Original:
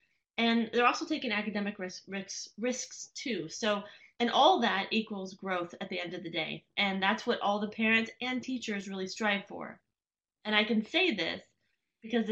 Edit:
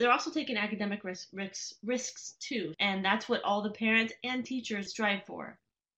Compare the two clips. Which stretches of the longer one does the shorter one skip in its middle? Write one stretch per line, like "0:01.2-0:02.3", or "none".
0:03.5-0:06.7
0:08.8-0:09.1